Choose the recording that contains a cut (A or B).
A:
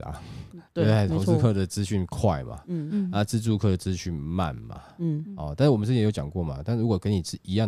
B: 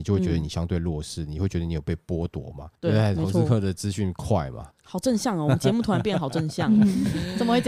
B